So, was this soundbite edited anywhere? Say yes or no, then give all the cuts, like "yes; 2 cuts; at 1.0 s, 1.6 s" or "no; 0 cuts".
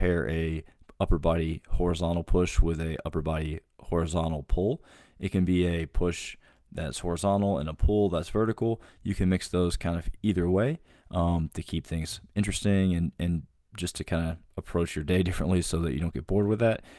no; 0 cuts